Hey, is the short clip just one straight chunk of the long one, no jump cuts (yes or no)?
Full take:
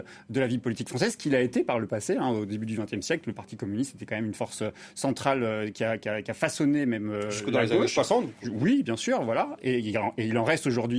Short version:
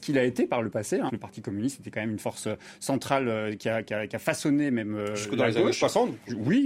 no